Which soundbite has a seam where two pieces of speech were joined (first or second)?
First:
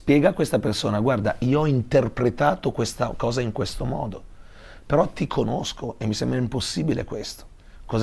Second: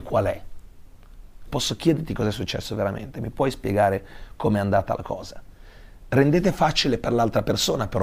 second